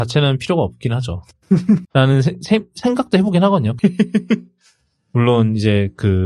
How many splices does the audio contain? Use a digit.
2